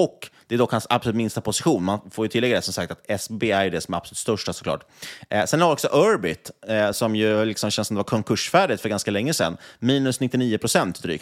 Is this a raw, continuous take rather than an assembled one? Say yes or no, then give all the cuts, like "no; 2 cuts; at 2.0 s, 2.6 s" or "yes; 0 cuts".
yes; 0 cuts